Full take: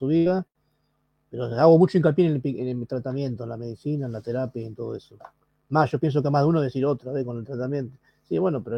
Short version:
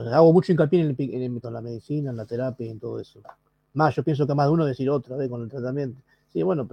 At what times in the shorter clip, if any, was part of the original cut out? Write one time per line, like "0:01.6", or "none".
0:01.4